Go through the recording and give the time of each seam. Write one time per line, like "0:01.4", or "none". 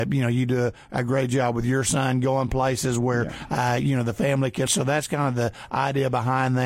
0:04.7